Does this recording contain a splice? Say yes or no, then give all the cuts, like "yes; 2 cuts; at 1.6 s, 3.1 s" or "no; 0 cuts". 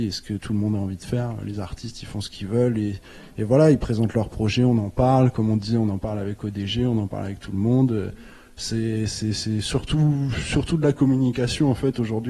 no; 0 cuts